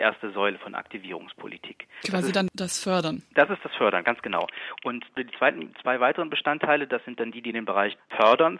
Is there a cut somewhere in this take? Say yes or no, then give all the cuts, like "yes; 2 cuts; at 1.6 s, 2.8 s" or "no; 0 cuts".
no; 0 cuts